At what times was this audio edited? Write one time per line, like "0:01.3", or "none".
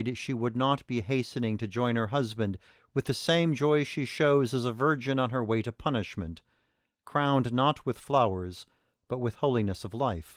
none